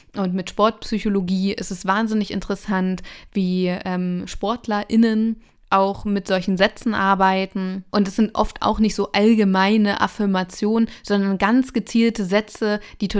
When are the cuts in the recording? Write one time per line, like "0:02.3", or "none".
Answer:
0:07.9